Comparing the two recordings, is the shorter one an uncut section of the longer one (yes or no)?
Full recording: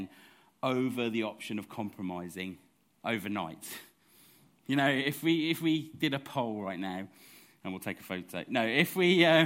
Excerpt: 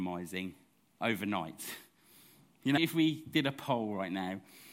no